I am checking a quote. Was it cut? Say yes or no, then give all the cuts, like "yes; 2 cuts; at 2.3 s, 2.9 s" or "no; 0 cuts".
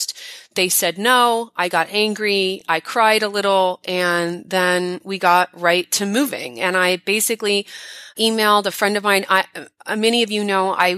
no; 0 cuts